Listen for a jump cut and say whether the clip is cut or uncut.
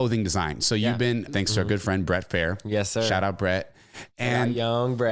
cut